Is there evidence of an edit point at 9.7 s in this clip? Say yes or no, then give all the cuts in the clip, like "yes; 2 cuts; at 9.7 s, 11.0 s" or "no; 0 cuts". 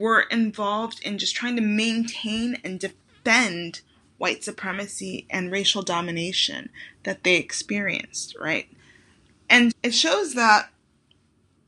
yes; 1 cut; at 9.7 s